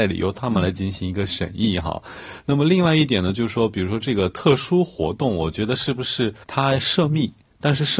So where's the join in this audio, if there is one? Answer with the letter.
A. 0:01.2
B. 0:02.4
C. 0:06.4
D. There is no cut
C